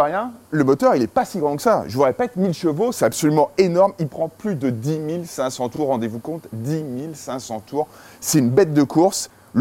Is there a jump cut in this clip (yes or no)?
no